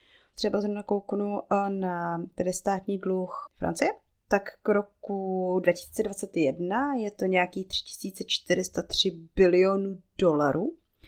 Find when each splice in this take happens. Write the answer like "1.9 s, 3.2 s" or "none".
3.5 s